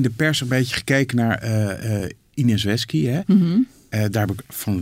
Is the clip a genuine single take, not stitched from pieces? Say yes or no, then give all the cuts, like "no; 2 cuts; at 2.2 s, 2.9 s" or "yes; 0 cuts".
yes; 0 cuts